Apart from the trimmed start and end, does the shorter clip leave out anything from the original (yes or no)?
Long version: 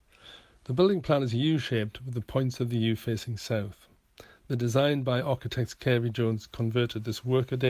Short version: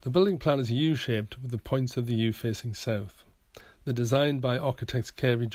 no